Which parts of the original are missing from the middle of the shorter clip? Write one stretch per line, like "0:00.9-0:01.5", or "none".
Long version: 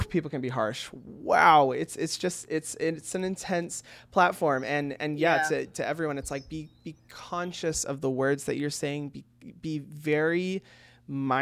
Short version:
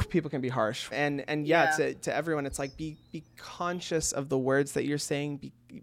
0:00.9-0:04.6